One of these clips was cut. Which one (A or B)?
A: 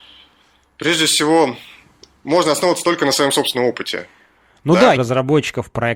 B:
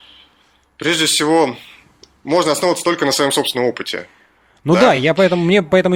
A